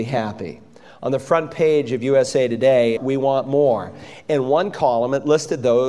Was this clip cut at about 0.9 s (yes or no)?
no